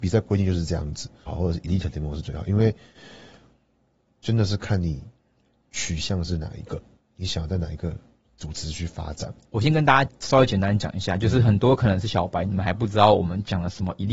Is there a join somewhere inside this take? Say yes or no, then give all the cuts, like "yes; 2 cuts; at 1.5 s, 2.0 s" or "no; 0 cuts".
yes; 1 cut; at 1.3 s